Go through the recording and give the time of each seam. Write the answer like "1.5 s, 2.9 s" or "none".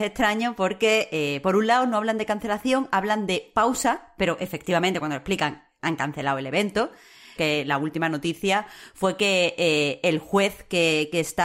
7.4 s